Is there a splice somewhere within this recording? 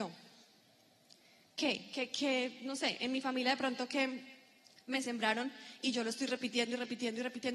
no; 0 cuts

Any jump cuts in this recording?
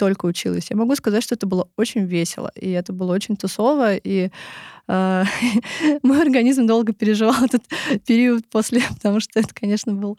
no; 0 cuts

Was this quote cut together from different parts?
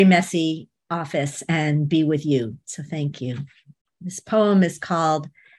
no; 0 cuts

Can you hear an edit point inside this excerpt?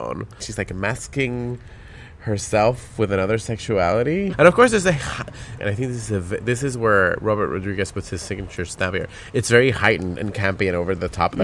yes; 2 cuts; at 4.3 s, 5.6 s

